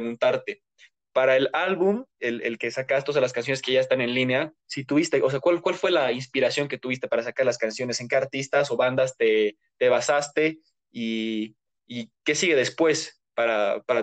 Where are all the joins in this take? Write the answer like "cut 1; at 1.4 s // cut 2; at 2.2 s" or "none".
none